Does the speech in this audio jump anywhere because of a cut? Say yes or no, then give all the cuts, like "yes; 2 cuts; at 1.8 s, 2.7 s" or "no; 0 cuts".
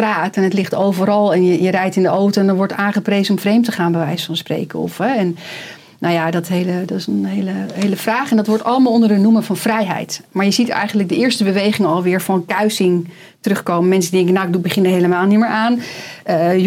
no; 0 cuts